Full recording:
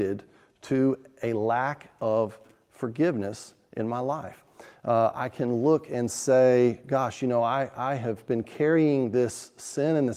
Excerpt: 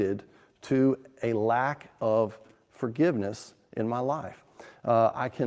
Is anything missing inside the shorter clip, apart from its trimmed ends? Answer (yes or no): no